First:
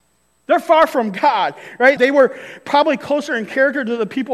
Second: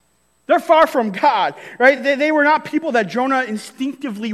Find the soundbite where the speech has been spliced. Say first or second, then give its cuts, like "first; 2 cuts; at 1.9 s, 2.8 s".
first; 1 cut; at 2.0 s